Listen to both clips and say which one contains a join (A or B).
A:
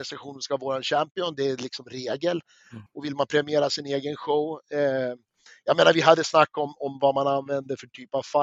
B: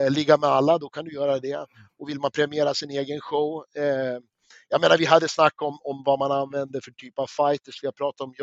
A